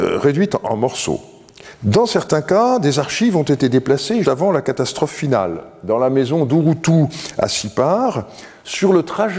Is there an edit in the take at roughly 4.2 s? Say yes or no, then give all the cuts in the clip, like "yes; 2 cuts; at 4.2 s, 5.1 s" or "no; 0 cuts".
yes; 2 cuts; at 1.7 s, 4.2 s